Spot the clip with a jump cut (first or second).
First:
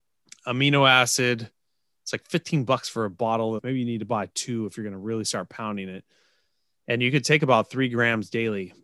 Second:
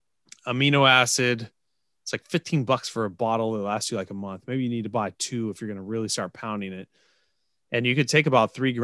first